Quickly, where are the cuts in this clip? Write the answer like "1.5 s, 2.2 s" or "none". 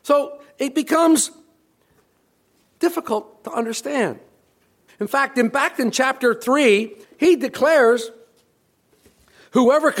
4.9 s, 7.0 s

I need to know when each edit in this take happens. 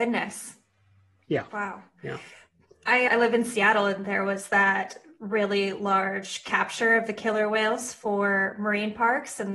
none

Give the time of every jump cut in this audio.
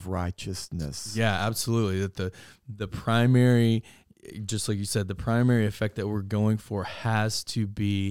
none

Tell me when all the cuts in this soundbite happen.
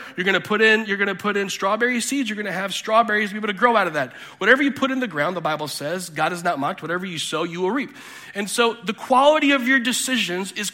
none

